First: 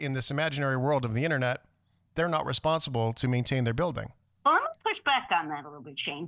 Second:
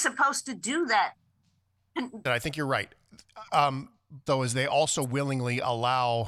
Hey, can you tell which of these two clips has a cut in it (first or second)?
second